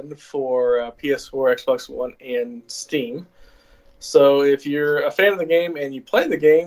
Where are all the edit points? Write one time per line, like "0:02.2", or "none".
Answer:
none

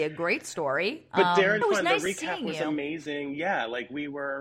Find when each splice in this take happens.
0:01.6

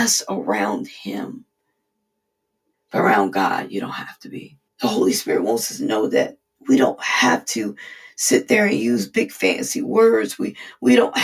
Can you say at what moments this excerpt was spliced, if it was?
0:02.7
0:04.7

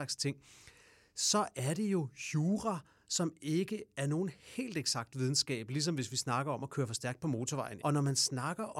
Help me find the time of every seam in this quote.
0:07.8

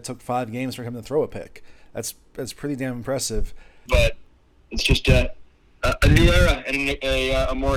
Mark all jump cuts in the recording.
0:03.9

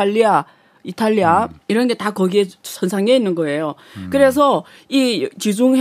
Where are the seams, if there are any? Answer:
0:01.6

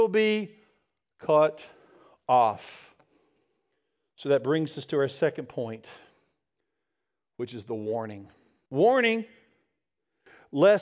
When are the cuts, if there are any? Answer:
0:08.7

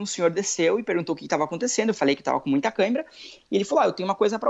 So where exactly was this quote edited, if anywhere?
none

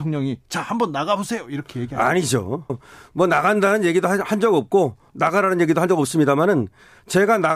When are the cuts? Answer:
0:02.7

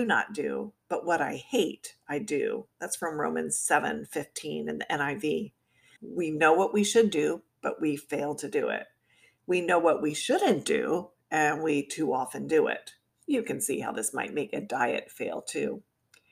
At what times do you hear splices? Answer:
0:06.0

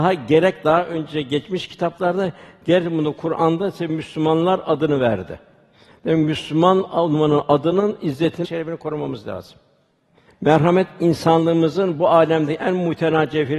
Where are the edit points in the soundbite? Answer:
0:08.4
0:10.3

